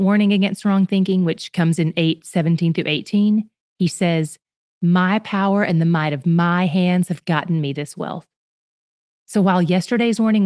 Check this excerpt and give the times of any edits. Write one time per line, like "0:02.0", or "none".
0:04.7